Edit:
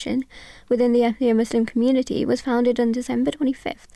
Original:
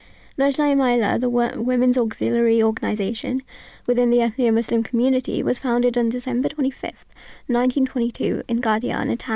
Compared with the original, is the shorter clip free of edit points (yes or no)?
yes